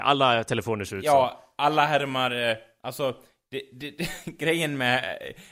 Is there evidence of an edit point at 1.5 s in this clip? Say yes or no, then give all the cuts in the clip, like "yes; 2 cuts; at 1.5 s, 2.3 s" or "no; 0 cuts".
no; 0 cuts